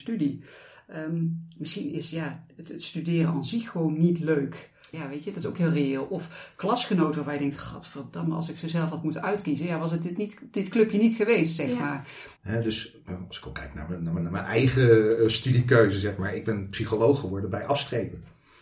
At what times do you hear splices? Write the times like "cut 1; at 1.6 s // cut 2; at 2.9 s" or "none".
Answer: cut 1; at 4.9 s // cut 2; at 12.4 s